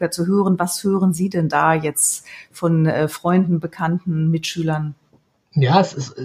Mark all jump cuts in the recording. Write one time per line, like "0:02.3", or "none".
none